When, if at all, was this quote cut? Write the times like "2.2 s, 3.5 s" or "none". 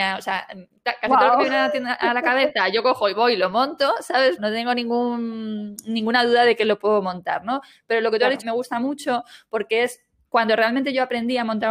4.4 s, 8.4 s